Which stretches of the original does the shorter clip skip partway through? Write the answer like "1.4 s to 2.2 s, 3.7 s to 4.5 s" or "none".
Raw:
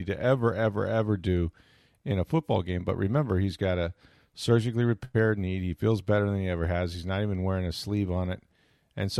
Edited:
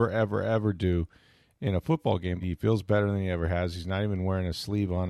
2.8 s to 5.6 s